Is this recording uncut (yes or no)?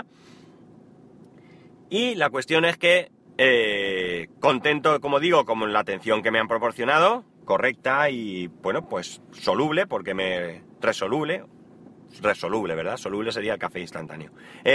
yes